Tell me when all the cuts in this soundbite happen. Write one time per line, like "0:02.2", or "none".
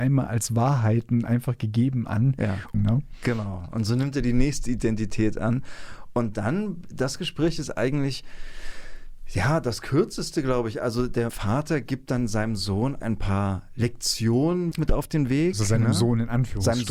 0:02.7
0:11.3
0:14.7